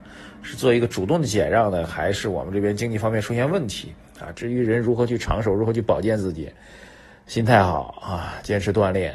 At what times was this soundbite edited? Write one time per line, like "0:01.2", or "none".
0:04.3